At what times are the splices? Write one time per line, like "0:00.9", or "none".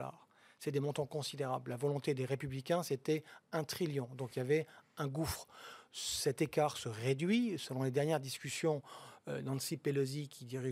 none